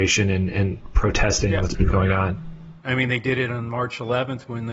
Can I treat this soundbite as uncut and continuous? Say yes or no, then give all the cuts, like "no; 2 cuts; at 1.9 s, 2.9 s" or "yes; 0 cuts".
no; 1 cut; at 2.8 s